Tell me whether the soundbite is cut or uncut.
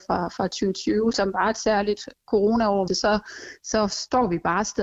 cut